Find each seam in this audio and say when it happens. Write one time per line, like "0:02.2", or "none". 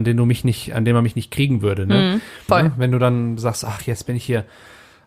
0:02.5